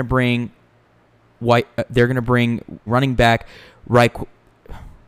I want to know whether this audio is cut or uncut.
cut